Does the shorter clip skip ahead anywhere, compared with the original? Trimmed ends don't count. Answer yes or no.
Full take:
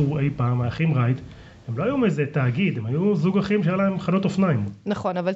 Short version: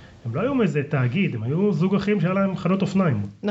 no